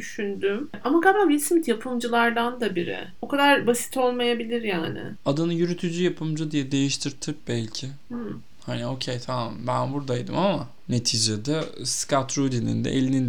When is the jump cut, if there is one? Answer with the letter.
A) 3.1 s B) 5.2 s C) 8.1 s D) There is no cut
A